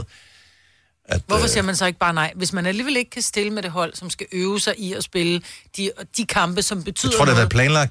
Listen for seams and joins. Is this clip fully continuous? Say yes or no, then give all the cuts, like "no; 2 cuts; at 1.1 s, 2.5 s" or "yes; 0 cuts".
no; 1 cut; at 6.1 s